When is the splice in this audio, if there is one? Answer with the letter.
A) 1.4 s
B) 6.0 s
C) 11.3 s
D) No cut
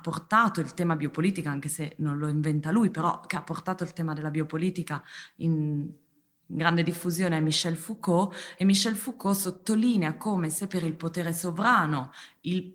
D